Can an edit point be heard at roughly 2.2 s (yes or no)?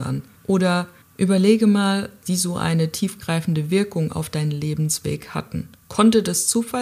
yes